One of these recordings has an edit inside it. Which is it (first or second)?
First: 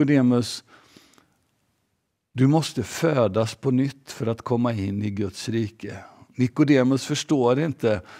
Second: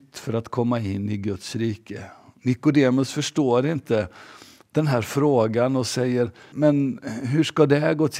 second